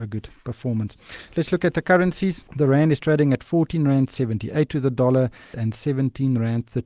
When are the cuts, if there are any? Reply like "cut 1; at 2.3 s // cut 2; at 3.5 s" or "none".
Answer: cut 1; at 2.5 s // cut 2; at 5.5 s